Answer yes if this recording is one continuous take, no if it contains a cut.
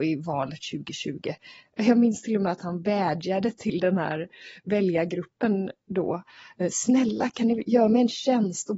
yes